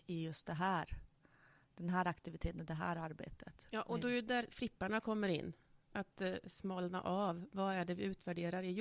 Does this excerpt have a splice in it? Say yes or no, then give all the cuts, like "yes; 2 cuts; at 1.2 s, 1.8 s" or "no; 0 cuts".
no; 0 cuts